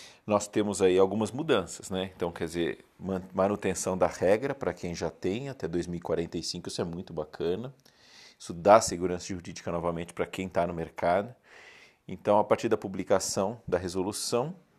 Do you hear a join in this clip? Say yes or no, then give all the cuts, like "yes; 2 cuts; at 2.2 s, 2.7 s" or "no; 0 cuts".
no; 0 cuts